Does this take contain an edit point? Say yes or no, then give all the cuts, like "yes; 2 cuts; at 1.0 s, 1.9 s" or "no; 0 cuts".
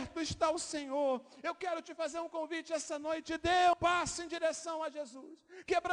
yes; 1 cut; at 3.7 s